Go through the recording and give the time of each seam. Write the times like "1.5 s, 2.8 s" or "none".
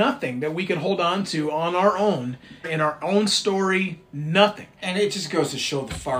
2.6 s